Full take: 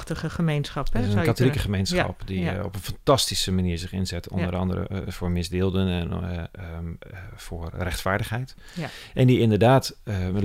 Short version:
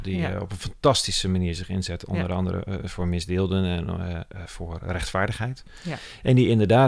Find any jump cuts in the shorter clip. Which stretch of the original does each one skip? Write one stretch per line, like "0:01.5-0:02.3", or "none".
0:06.7-0:07.4